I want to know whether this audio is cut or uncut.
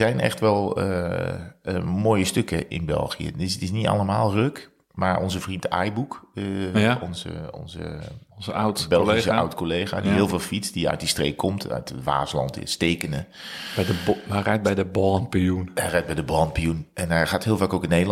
uncut